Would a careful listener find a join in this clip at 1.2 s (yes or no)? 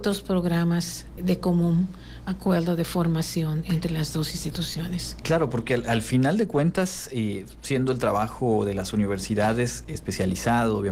yes